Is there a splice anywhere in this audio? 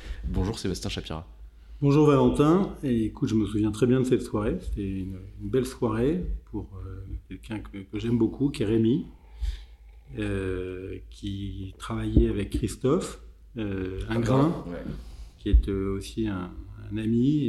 no; 0 cuts

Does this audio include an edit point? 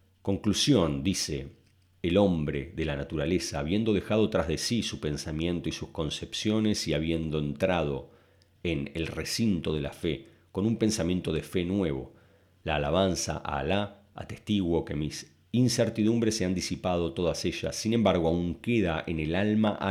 no; 0 cuts

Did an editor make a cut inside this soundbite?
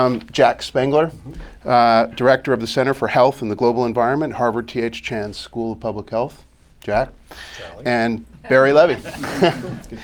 no; 0 cuts

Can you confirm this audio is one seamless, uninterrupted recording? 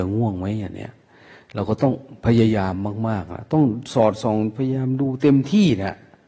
yes; 0 cuts

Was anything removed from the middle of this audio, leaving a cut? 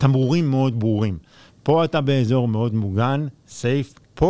no; 0 cuts

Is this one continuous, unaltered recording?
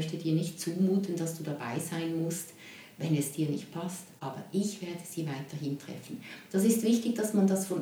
yes; 0 cuts

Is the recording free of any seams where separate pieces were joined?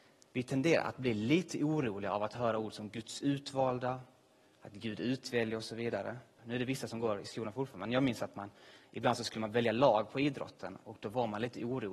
no; 1 cut; at 6.4 s

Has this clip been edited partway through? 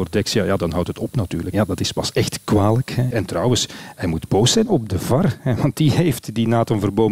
yes; 2 cuts; at 1.5 s, 3.1 s

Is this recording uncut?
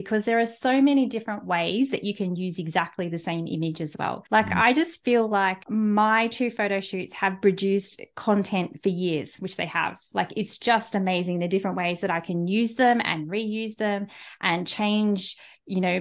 yes; 0 cuts

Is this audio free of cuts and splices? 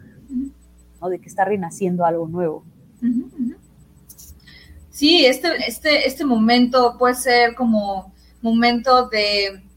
no; 2 cuts; at 1.0 s, 5.6 s

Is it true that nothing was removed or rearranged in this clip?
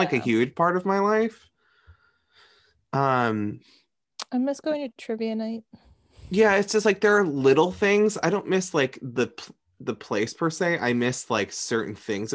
yes; 0 cuts

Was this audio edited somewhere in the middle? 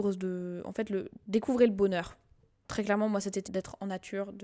yes; 1 cut; at 3.5 s

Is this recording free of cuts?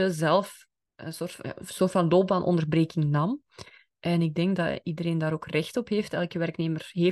yes; 0 cuts

